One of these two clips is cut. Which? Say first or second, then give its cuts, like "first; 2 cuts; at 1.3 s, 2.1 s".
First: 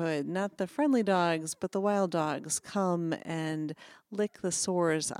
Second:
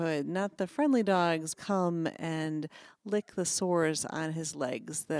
second; 1 cut; at 1.5 s